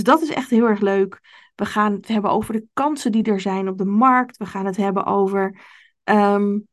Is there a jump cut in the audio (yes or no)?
no